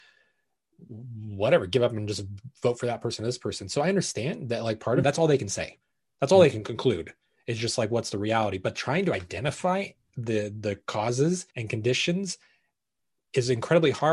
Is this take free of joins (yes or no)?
no